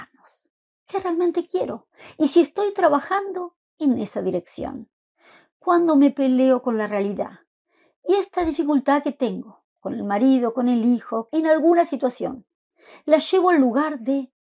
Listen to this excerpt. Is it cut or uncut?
cut